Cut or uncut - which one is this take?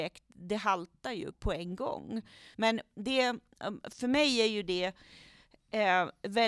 cut